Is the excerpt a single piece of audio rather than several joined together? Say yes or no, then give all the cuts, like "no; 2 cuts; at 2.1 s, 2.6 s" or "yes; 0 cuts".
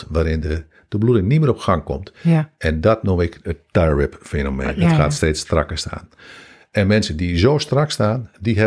yes; 0 cuts